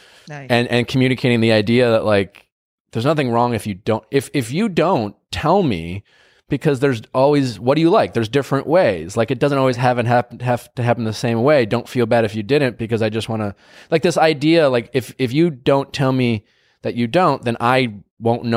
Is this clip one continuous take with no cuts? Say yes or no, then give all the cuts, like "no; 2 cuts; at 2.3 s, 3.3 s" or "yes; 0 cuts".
yes; 0 cuts